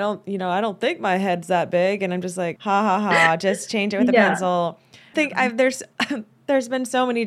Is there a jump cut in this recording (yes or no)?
yes